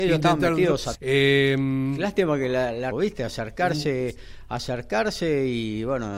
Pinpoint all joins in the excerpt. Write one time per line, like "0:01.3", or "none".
0:00.9
0:02.9